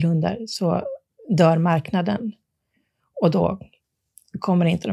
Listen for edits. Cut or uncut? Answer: uncut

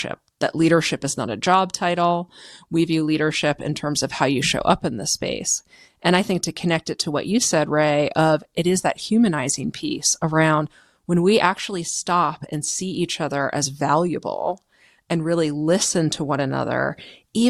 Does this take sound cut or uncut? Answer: uncut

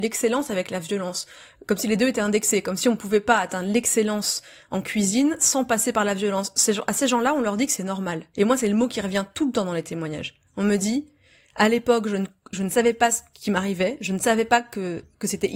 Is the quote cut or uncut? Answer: uncut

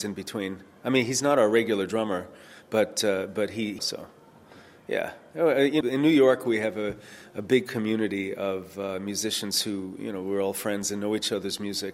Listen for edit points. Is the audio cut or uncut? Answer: cut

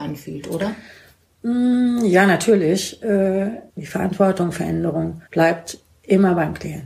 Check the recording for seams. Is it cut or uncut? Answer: cut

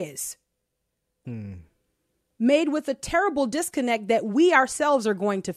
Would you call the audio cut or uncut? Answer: cut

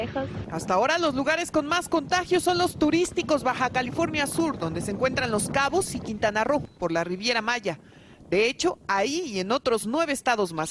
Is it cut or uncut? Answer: uncut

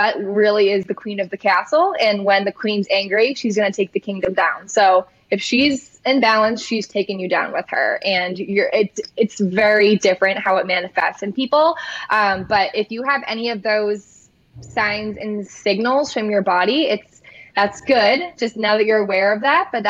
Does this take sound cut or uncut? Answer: uncut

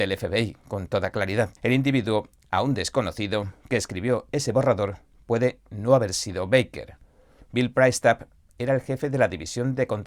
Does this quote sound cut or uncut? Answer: cut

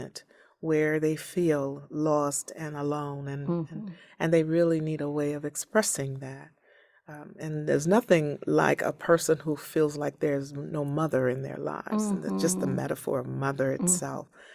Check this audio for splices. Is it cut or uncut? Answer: uncut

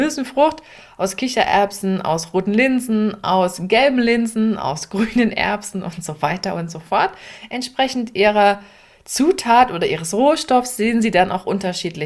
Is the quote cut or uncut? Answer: uncut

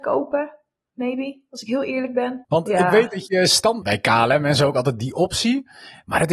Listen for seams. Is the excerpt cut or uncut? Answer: cut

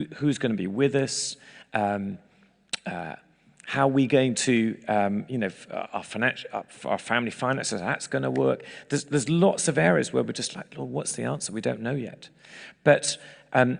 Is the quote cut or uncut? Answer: uncut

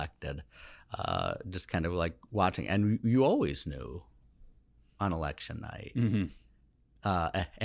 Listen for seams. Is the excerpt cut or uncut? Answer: uncut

